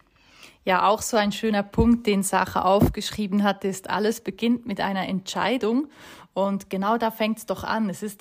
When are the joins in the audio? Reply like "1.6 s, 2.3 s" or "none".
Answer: none